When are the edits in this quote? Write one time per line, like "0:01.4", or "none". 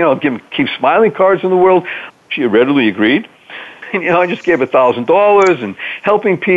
0:02.1
0:03.8